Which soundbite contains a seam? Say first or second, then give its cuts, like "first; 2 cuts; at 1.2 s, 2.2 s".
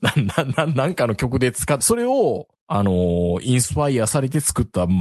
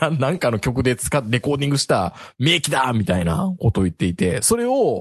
first; 1 cut; at 1.8 s